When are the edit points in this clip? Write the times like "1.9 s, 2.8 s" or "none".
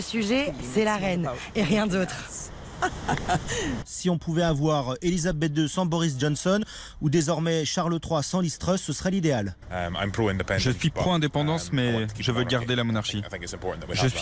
3.8 s